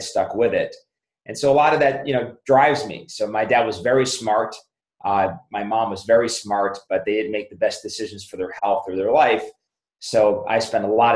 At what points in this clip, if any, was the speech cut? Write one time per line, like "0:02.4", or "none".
none